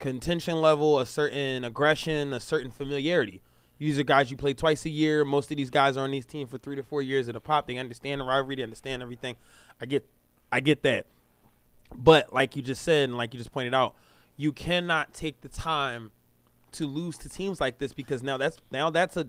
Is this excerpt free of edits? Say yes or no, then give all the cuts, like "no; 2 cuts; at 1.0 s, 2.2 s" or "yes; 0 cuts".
no; 1 cut; at 10.5 s